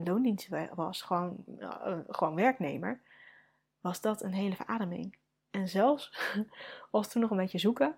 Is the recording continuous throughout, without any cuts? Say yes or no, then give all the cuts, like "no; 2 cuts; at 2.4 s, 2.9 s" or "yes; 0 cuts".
yes; 0 cuts